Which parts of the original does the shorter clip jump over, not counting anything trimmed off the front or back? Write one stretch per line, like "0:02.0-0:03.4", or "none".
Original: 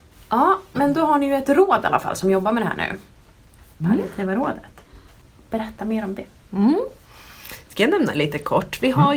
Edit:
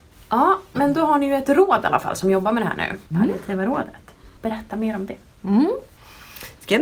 0:03.1-0:03.8
0:05.1-0:05.4